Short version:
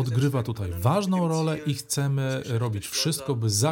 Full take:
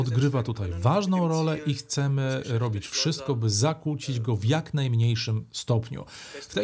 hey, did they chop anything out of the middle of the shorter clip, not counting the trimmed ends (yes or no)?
no